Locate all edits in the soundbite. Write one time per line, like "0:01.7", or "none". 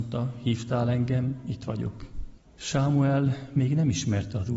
0:02.4